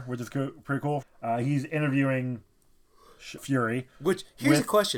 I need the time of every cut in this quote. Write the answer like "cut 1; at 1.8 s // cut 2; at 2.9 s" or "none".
cut 1; at 1.0 s // cut 2; at 3.4 s